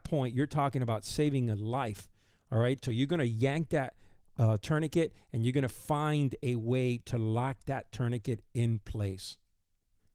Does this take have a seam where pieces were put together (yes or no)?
no